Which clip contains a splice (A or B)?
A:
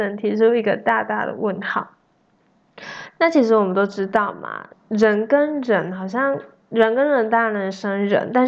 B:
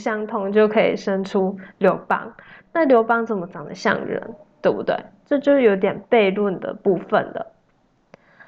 A